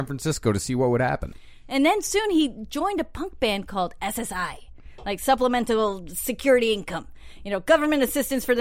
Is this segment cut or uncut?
uncut